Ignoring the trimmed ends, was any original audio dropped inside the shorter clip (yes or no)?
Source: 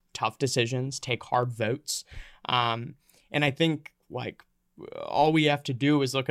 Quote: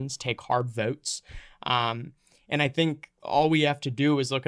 yes